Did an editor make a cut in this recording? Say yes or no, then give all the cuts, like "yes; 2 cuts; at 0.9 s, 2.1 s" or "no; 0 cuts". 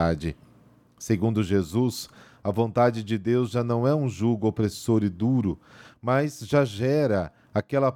no; 0 cuts